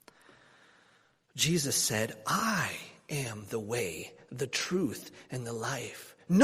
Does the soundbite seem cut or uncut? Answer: uncut